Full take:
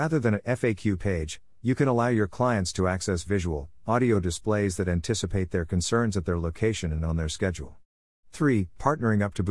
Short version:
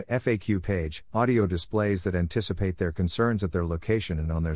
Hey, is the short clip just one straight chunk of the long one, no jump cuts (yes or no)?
no